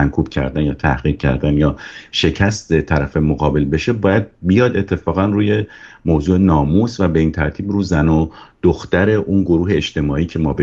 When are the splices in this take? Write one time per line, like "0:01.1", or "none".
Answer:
none